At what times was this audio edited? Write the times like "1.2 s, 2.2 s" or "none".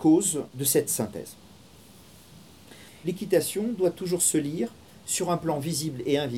2.9 s